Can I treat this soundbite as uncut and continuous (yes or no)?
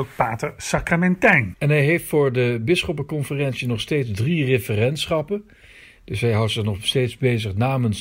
no